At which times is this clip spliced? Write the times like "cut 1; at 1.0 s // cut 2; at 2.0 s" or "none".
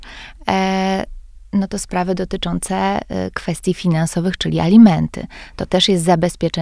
none